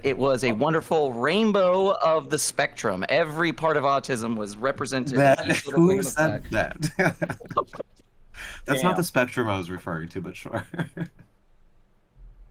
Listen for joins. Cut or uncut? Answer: uncut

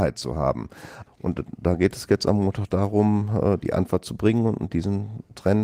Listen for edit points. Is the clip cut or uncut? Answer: cut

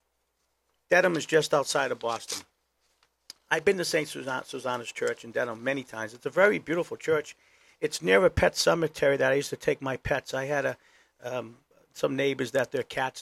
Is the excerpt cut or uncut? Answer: uncut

